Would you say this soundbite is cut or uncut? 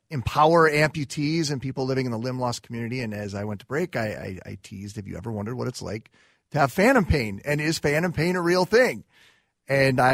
uncut